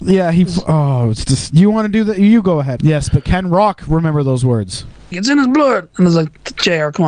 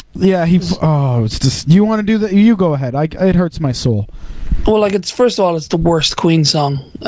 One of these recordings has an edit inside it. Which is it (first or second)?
first